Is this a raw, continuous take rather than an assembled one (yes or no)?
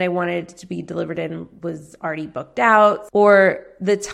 no